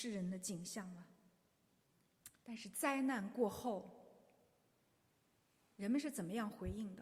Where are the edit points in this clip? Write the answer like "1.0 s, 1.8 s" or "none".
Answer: 2.3 s